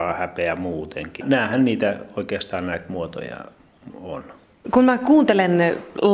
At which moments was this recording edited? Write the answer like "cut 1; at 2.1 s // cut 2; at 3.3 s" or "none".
cut 1; at 1.2 s // cut 2; at 4.6 s